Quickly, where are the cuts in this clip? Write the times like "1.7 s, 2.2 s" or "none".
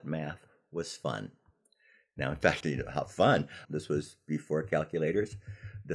2.6 s, 3.7 s